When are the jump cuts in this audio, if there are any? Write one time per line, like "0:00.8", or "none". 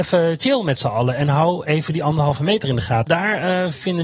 0:03.1